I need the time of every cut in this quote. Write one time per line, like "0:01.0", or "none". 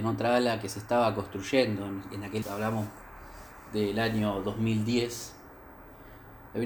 0:02.4